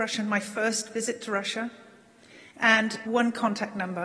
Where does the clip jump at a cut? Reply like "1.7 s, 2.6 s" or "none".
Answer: 3.1 s

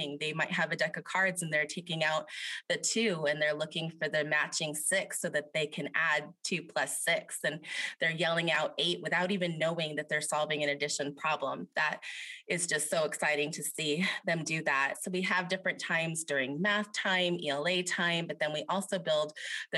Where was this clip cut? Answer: none

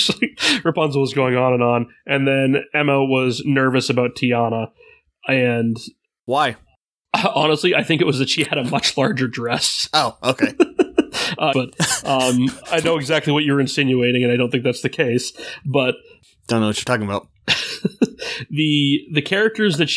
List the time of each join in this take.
11.5 s

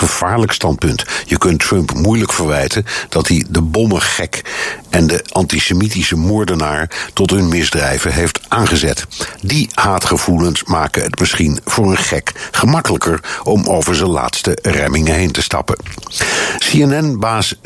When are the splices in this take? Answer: 9.4 s

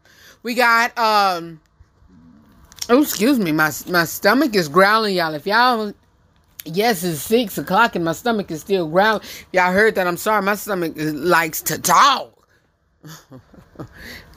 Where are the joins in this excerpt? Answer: none

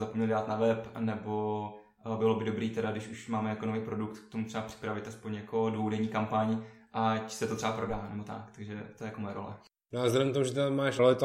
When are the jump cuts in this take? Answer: none

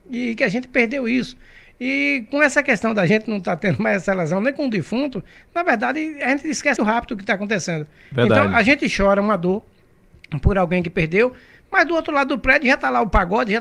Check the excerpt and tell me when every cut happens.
6.8 s

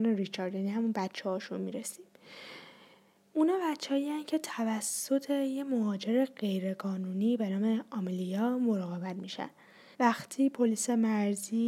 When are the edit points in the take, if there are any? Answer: 9.9 s

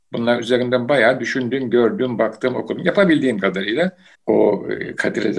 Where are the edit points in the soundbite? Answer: 4.1 s

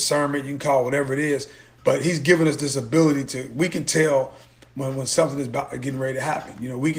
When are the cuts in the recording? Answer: none

